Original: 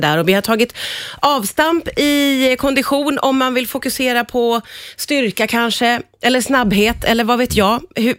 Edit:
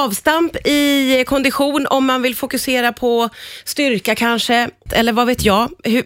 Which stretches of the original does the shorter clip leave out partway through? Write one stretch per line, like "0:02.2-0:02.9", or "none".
0:06.2-0:07.0